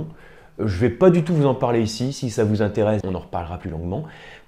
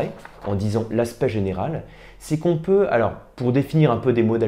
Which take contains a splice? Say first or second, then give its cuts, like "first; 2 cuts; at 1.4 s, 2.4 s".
first; 1 cut; at 3.0 s